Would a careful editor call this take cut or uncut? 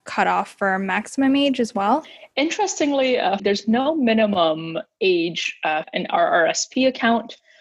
cut